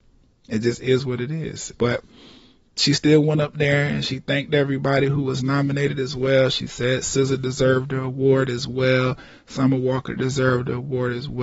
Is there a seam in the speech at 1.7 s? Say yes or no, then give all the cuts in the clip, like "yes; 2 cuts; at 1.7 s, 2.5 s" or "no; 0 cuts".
yes; 1 cut; at 1.7 s